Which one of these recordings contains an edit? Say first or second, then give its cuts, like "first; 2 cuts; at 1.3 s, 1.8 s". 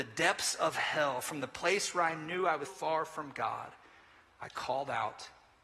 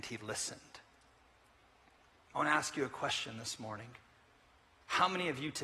first; 1 cut; at 2.6 s